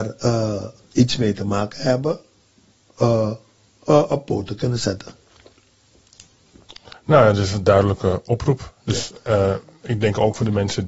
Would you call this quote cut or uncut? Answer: uncut